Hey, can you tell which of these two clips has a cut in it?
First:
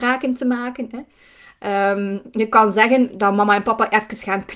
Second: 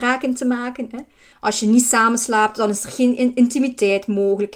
second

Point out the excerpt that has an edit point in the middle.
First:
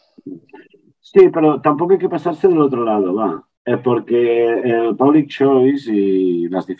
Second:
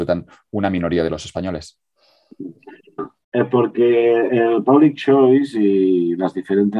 second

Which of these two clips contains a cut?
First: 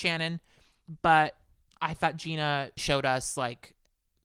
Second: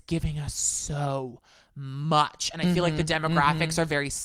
first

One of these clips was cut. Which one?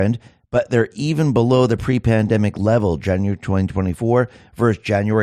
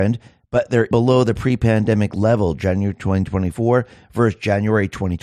second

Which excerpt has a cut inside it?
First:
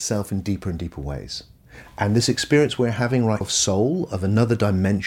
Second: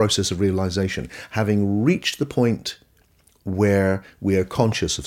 first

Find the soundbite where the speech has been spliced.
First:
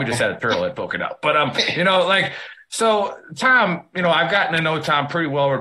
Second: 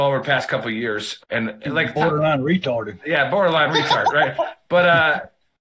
second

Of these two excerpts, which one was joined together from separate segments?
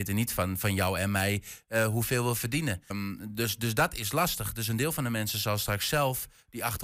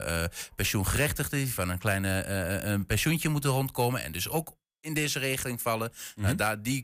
first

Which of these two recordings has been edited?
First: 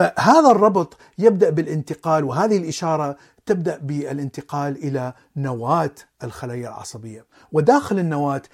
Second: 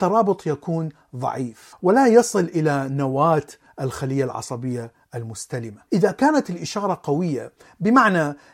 second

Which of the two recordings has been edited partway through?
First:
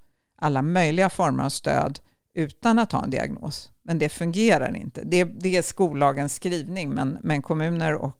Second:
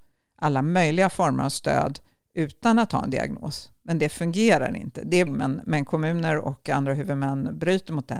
second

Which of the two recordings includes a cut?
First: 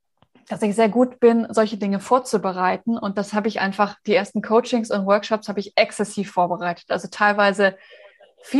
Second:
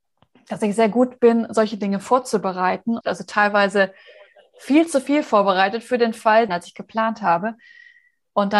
second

